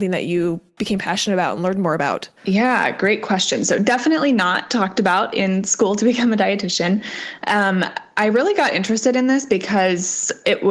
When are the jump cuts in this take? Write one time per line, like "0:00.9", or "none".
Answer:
0:02.4